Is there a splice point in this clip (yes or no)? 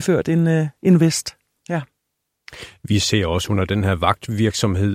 yes